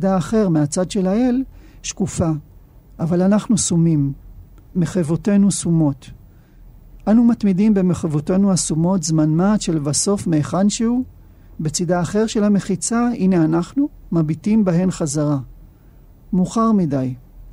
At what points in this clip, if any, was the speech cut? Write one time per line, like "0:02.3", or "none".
none